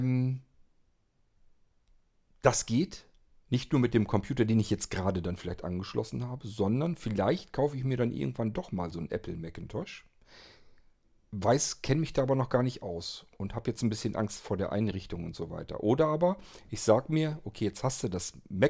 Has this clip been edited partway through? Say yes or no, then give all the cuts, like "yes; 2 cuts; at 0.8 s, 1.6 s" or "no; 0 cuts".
no; 0 cuts